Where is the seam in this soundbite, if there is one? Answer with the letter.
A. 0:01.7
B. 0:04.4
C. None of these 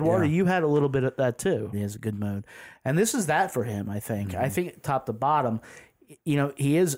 A